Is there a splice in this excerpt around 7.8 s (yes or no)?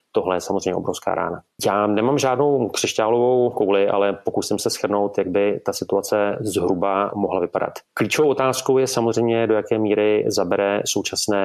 no